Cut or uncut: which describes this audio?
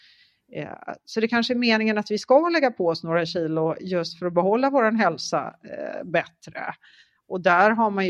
uncut